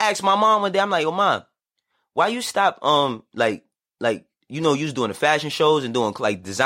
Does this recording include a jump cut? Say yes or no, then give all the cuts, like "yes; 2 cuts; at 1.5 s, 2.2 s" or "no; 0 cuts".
no; 0 cuts